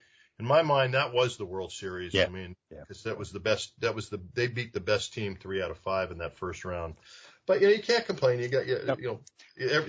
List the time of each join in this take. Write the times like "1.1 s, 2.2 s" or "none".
none